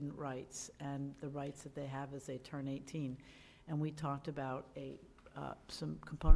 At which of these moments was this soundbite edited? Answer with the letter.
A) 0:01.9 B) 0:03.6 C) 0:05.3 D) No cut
D